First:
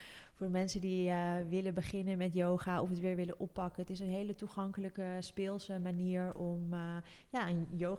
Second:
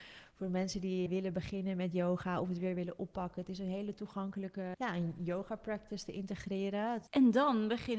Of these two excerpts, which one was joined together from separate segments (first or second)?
second